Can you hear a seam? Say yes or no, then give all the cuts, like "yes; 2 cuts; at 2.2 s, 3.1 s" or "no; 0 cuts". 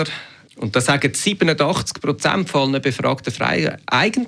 no; 0 cuts